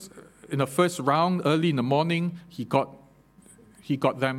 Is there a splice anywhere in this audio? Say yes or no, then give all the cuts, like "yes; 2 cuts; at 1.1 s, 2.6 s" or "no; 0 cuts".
no; 0 cuts